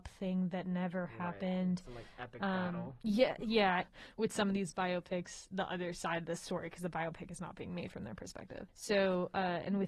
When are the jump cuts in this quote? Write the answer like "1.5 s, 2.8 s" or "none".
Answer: 3.8 s, 8.7 s